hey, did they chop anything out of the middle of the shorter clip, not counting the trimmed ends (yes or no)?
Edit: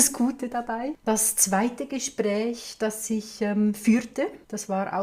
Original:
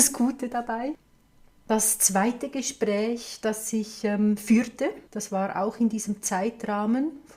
yes